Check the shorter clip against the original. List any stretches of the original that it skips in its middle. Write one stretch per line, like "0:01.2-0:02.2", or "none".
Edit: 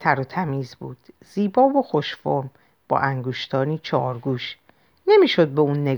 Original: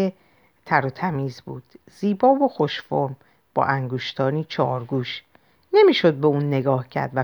none